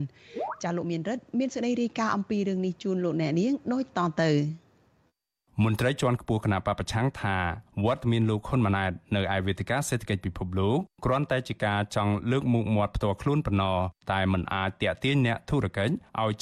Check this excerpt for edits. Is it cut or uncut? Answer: uncut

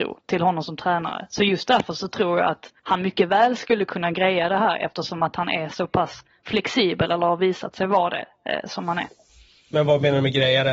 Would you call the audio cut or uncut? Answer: cut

